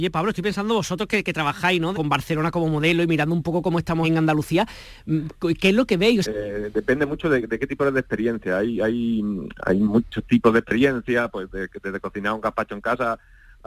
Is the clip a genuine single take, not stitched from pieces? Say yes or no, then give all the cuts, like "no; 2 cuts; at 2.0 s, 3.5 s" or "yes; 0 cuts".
no; 3 cuts; at 1.9 s, 4.0 s, 6.2 s